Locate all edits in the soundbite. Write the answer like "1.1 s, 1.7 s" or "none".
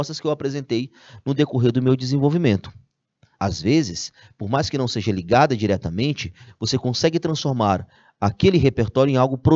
3.3 s, 6.5 s